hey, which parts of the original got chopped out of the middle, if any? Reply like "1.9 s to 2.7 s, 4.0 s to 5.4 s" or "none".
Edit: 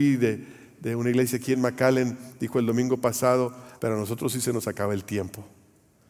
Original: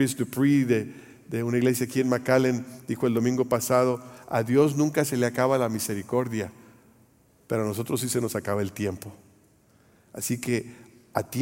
4.2 s to 7.4 s